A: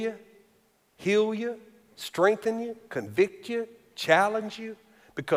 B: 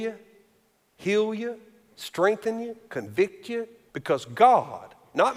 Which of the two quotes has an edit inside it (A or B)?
B